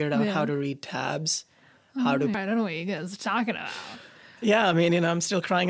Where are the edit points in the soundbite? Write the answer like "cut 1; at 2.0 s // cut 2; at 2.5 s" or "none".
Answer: cut 1; at 2.3 s